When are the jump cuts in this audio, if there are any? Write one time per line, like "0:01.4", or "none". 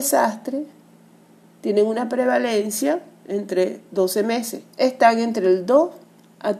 0:04.7